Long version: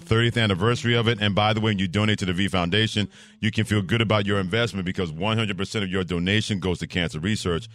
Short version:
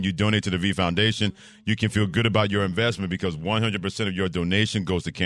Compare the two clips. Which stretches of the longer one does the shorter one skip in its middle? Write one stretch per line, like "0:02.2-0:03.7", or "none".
none